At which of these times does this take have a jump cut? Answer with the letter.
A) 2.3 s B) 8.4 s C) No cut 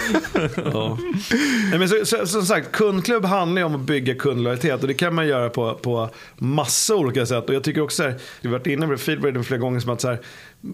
B